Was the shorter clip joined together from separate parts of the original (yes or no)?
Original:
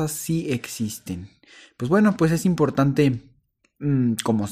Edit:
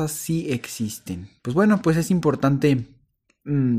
yes